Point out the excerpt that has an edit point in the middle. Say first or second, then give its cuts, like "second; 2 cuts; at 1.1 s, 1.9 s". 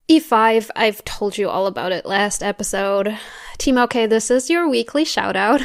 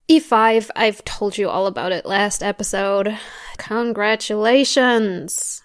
second; 1 cut; at 3.6 s